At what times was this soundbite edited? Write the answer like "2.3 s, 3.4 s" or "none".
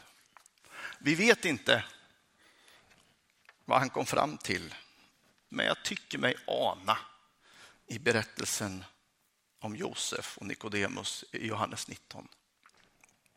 5.5 s